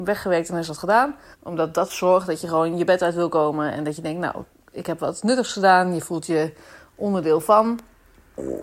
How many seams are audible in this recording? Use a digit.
1